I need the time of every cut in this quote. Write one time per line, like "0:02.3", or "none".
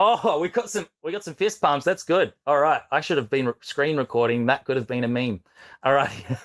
none